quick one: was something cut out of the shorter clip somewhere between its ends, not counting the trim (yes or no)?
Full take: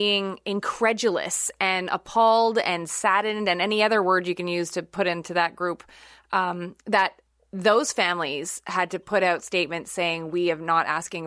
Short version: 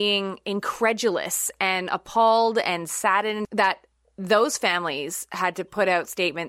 yes